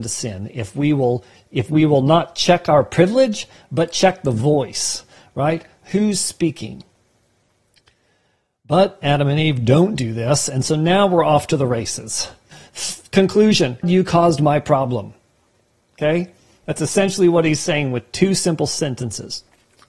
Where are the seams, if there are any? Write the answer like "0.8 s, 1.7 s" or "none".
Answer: 12.5 s, 13.8 s